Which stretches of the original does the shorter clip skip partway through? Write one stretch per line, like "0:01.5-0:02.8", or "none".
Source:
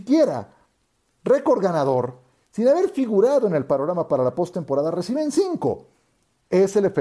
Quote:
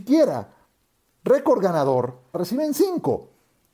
0:02.3-0:04.9